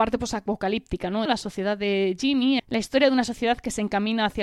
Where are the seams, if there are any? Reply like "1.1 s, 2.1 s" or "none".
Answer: 1.3 s, 2.6 s